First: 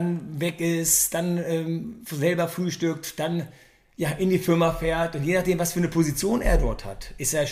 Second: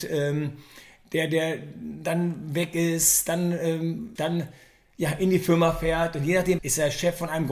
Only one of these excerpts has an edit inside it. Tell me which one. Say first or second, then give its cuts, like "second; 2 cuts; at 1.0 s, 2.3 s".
second; 2 cuts; at 4.2 s, 6.6 s